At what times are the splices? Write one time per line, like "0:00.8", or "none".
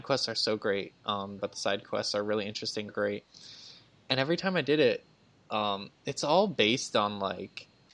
0:01.4
0:02.9